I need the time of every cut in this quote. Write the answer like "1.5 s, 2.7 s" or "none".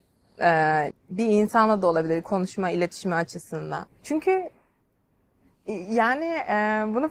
0.9 s, 3.9 s